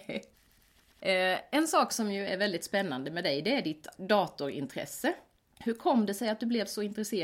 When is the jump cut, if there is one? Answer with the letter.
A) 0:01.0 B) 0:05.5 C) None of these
C